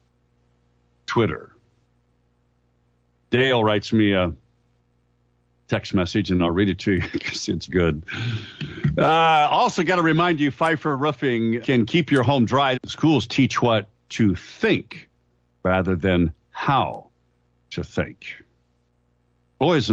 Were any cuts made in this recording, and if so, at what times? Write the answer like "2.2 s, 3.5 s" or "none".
7.7 s, 11.6 s, 12.7 s